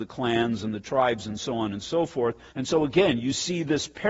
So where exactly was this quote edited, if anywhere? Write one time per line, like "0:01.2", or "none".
0:02.5